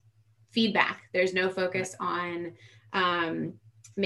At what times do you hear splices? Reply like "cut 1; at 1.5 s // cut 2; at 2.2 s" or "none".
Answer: none